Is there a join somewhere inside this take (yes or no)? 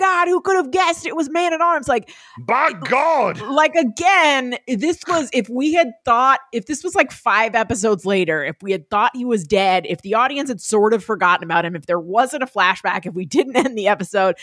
no